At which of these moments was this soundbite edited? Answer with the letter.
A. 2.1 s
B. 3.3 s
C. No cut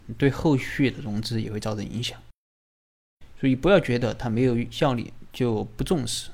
C